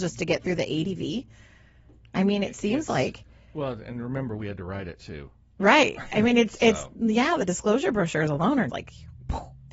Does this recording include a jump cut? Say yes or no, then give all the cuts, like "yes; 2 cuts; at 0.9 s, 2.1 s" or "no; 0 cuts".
yes; 1 cut; at 8.7 s